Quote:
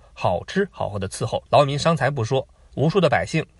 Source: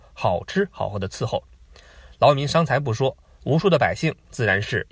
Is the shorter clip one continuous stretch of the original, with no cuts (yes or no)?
no